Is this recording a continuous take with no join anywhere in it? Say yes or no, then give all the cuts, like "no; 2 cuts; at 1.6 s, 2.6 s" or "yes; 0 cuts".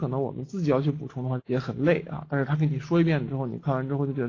no; 1 cut; at 1.4 s